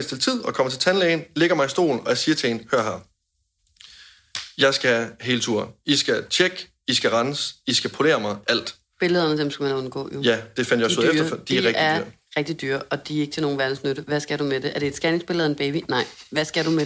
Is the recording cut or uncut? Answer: cut